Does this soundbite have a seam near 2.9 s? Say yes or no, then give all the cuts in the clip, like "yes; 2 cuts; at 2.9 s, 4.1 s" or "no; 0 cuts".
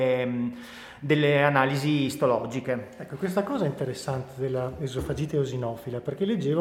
no; 0 cuts